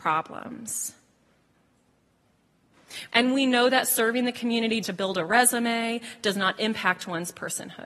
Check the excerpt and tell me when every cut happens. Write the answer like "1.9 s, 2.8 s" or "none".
3.1 s, 4.8 s